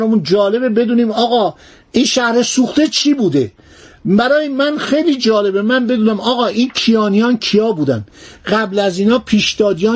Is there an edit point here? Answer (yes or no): no